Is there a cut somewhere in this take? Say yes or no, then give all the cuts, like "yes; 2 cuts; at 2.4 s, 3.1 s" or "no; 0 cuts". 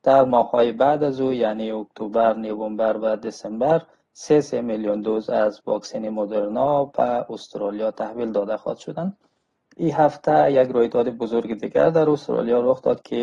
no; 0 cuts